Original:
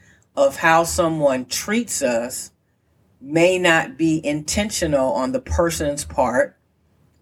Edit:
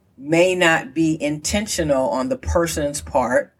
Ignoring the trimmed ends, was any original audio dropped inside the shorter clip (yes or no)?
no